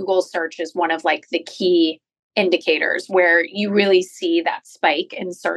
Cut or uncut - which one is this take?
uncut